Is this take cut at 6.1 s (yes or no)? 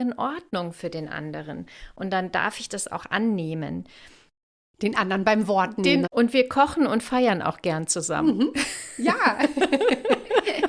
yes